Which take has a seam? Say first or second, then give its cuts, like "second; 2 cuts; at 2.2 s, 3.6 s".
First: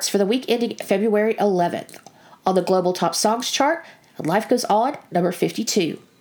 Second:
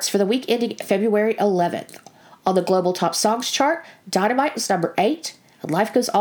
first; 1 cut; at 4.0 s